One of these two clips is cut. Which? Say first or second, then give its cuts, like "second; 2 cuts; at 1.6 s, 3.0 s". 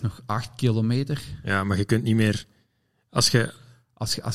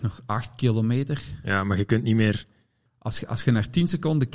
second; 1 cut; at 2.9 s